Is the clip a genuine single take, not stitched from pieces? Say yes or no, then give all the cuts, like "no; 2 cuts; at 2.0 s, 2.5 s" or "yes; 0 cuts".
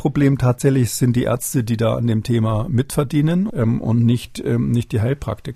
no; 1 cut; at 3.5 s